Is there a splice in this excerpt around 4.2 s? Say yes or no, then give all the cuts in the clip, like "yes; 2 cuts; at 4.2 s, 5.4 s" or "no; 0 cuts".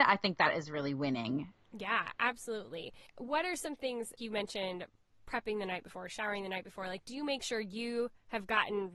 yes; 1 cut; at 4.2 s